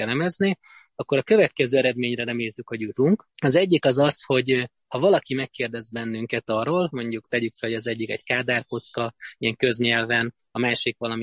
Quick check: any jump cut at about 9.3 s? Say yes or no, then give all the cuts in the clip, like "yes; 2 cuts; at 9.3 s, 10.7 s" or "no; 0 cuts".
no; 2 cuts; at 3.3 s, 6.9 s